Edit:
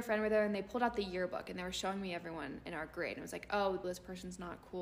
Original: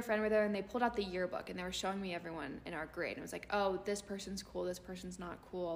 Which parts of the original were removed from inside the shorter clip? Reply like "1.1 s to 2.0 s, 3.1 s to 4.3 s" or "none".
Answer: 3.8 s to 4.6 s